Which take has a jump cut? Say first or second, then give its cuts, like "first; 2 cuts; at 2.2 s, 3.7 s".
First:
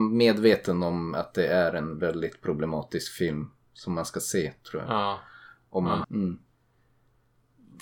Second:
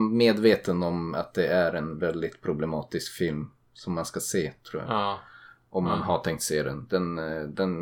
first; 1 cut; at 6.0 s